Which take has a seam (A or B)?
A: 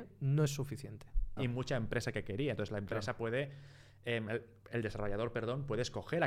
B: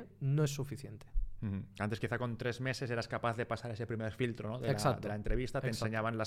A